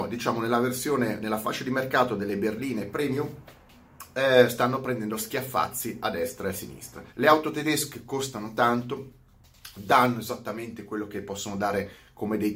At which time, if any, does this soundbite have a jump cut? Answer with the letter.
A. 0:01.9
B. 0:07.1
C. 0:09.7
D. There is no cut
B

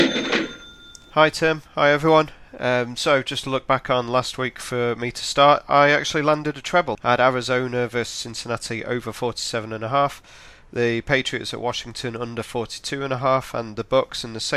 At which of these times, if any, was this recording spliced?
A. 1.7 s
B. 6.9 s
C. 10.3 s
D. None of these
B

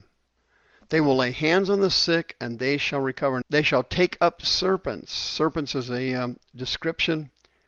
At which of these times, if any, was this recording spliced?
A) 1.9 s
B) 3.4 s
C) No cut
B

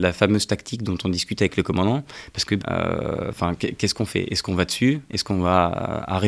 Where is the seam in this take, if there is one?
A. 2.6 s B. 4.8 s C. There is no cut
A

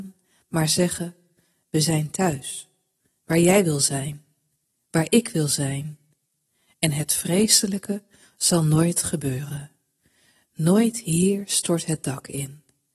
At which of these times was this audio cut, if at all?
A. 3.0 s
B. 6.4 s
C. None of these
C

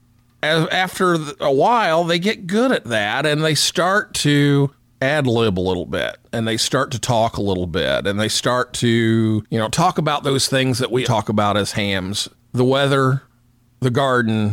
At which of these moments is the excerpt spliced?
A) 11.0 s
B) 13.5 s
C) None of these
A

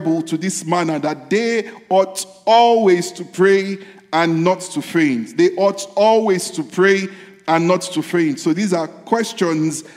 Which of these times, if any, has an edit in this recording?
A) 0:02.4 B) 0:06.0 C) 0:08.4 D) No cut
D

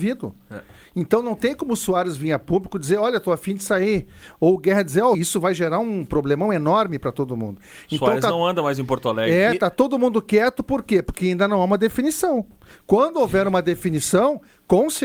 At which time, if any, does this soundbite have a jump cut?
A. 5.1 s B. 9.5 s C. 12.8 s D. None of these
A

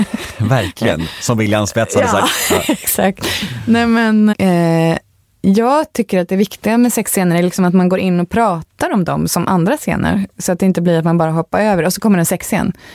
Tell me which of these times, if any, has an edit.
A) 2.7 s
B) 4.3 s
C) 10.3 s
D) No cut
B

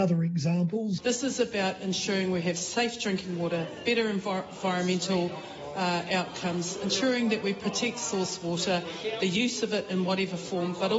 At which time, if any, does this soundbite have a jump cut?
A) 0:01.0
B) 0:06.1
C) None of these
A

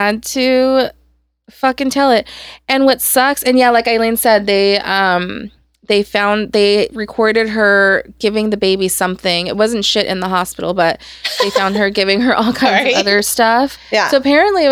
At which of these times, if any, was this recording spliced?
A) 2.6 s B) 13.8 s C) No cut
B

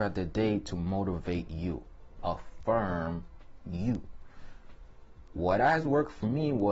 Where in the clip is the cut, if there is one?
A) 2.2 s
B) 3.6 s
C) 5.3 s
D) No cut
A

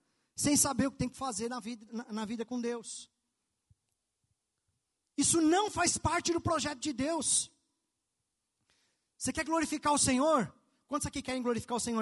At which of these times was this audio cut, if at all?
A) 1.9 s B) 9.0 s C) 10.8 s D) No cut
A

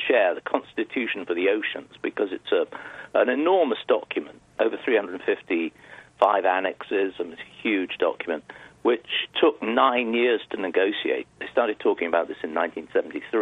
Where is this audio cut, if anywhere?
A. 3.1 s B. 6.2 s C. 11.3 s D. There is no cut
B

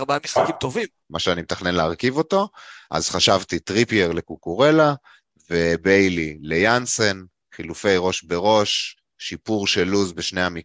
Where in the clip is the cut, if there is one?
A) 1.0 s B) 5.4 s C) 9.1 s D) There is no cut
A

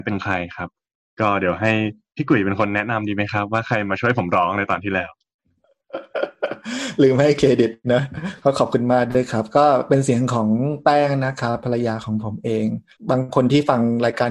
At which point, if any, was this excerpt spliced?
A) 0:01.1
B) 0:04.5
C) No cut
C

